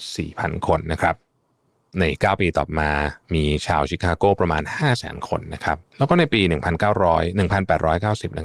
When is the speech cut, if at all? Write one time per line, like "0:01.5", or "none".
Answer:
0:03.2
0:05.9